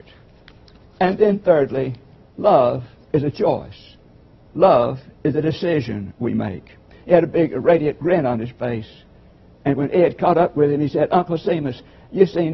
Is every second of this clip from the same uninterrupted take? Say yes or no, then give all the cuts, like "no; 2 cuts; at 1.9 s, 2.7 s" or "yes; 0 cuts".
no; 1 cut; at 7.0 s